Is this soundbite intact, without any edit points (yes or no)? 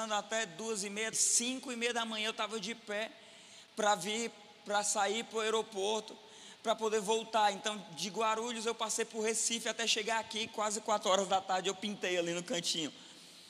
no